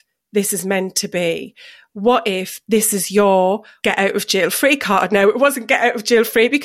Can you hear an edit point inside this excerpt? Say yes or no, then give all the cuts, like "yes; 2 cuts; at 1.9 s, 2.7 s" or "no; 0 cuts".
no; 0 cuts